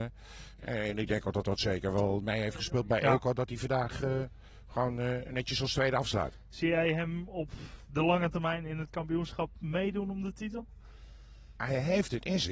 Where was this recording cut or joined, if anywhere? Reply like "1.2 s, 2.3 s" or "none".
none